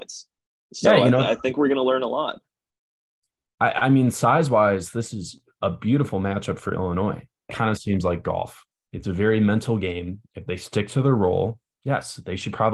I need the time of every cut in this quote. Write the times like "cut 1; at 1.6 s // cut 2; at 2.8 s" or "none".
cut 1; at 7.5 s